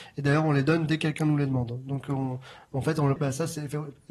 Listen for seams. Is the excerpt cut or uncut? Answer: cut